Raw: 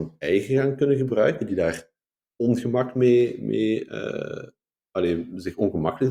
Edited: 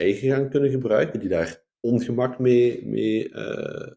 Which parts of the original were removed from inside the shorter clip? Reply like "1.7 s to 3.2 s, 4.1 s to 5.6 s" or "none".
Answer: 2.0 s to 2.3 s